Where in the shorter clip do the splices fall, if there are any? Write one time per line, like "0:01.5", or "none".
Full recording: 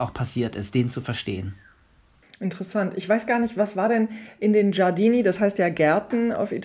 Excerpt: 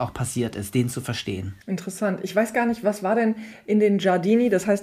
0:01.6